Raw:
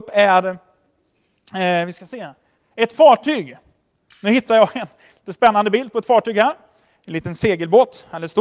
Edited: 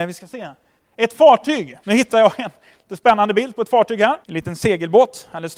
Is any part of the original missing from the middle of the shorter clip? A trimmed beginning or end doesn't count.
yes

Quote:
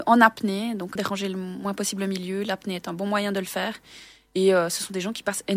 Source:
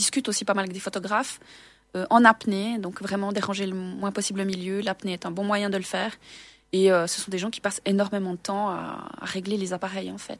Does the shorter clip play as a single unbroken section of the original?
no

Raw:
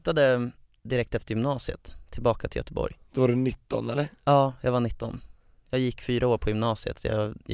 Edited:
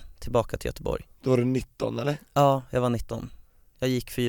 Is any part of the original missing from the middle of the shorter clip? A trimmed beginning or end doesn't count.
no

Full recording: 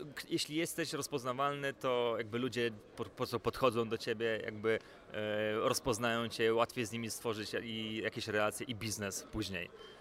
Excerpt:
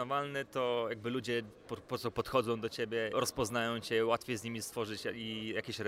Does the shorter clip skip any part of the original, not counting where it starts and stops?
yes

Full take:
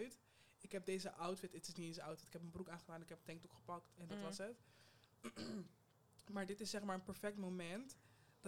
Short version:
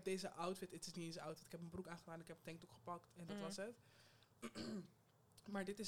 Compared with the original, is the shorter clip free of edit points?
yes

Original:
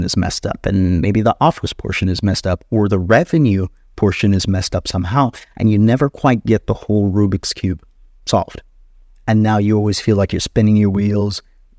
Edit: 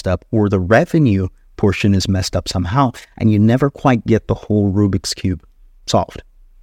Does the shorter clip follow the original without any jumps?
yes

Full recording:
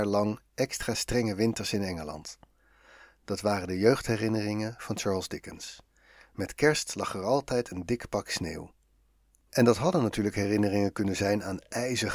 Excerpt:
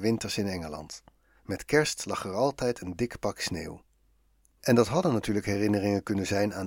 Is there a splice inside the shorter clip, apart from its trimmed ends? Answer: yes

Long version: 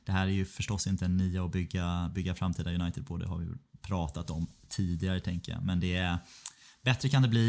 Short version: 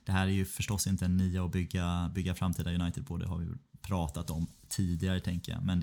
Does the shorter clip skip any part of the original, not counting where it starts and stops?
no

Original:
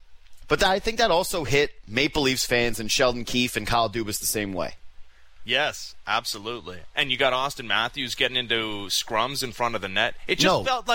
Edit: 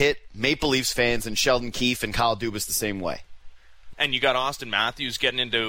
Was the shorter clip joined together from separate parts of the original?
yes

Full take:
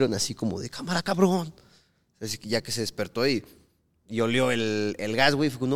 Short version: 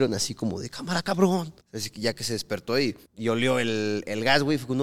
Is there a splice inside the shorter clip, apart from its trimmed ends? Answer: yes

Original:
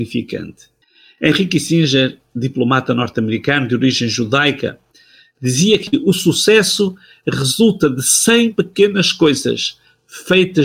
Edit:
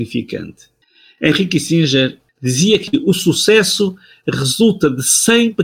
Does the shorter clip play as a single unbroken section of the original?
no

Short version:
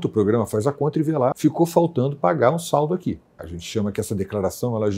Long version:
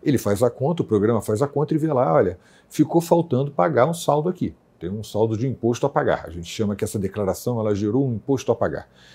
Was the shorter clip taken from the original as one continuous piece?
no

